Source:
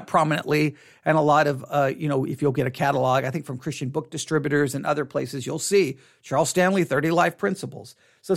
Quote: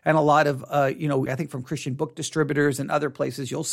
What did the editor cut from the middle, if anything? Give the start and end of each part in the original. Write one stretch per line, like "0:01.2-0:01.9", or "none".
0:02.3-0:03.2